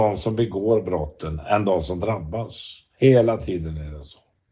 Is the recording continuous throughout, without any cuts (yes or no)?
yes